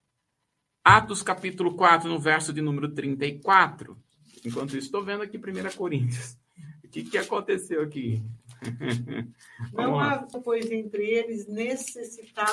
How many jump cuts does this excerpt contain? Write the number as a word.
one